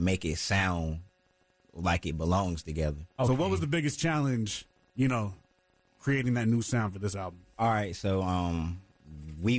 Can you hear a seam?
yes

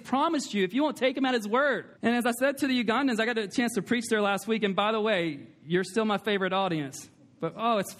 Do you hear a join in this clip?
yes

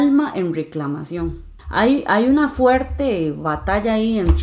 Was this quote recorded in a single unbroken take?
no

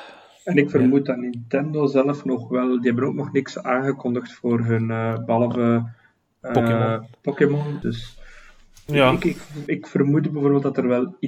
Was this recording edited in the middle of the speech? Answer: yes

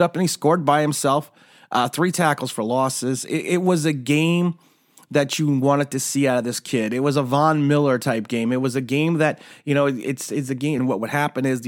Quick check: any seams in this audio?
yes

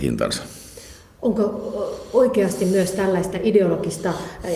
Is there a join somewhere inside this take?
no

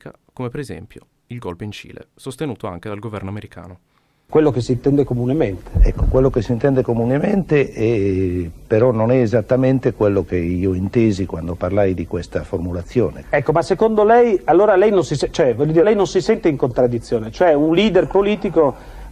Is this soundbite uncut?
no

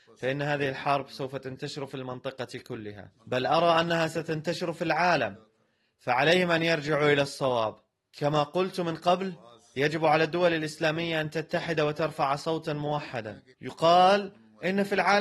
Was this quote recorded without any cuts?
no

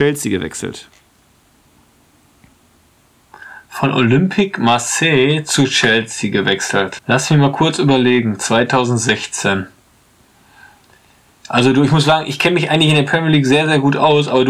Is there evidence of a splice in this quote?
yes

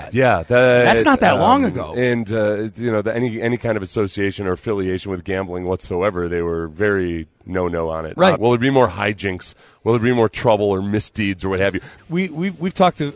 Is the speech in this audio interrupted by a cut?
yes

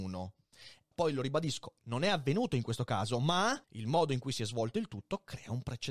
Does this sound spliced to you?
yes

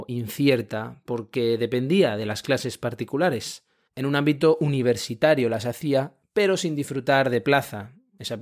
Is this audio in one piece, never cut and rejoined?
yes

